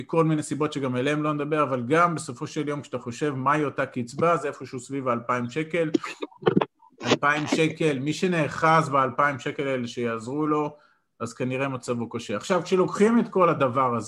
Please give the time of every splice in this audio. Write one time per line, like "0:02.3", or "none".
none